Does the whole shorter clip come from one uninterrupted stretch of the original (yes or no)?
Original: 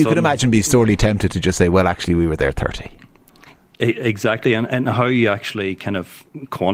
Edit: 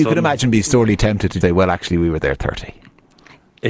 no